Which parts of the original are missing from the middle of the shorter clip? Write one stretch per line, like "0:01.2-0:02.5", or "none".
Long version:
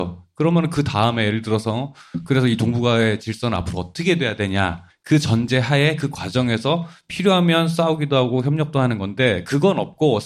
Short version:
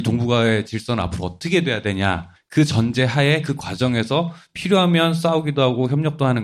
none